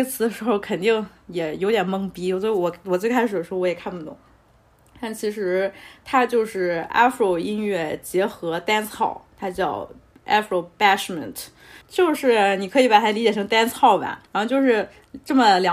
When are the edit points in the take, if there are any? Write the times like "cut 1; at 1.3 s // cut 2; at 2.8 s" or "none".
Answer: cut 1; at 11.8 s // cut 2; at 14.3 s

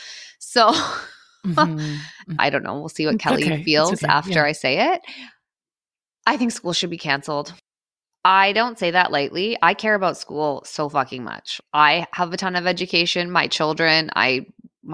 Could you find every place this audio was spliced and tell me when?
cut 1; at 2.4 s

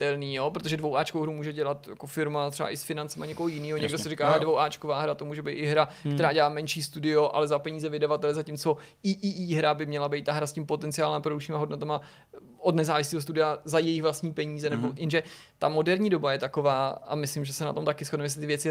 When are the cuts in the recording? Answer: none

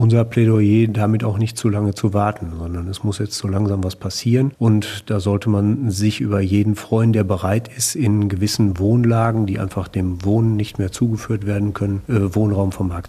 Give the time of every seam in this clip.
none

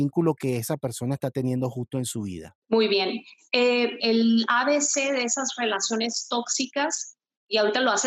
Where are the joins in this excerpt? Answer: cut 1; at 2.6 s // cut 2; at 4.0 s

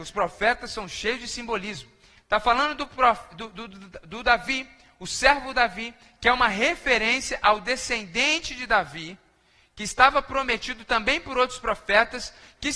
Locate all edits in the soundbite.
none

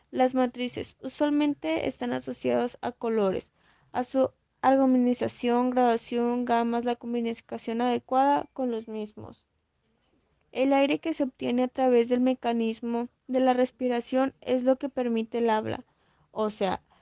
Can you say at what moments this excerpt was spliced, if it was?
cut 1; at 10.3 s // cut 2; at 13.2 s

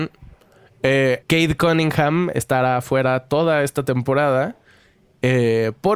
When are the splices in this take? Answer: cut 1; at 1.2 s

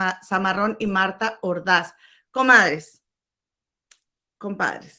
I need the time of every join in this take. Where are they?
none

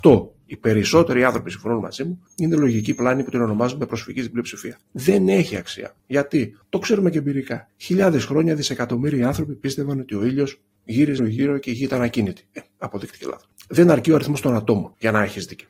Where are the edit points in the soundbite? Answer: cut 1; at 11.2 s

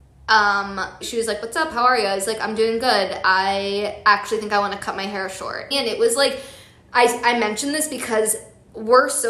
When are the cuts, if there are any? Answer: cut 1; at 1.0 s // cut 2; at 5.7 s

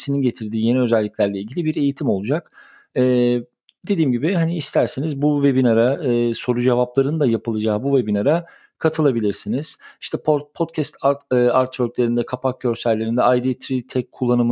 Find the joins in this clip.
none

